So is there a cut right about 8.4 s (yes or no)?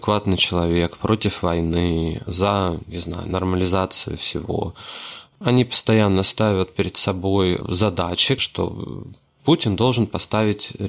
yes